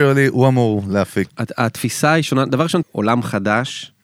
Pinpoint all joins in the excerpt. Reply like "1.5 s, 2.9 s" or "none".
1.3 s, 2.8 s